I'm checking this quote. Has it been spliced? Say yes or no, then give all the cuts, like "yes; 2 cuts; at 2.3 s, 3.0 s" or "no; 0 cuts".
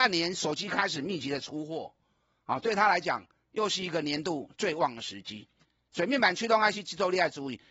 no; 0 cuts